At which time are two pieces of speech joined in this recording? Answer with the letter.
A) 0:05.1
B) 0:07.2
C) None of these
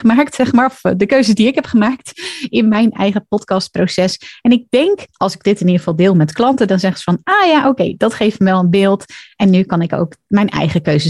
A